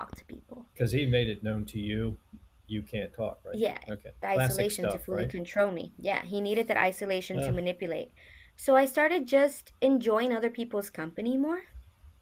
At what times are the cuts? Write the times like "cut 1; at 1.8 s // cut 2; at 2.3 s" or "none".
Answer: cut 1; at 4.2 s